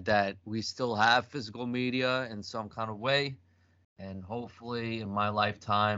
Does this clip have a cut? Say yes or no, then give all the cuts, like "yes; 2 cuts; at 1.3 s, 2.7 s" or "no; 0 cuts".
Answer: no; 0 cuts